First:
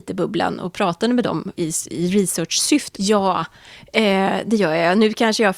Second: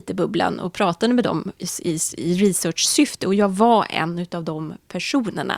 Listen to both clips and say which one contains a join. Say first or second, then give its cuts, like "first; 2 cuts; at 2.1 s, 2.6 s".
first; 2 cuts; at 1.6 s, 2.9 s